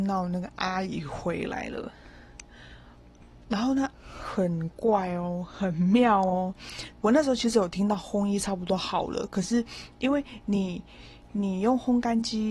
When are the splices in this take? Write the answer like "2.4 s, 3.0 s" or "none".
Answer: 3.9 s, 7.0 s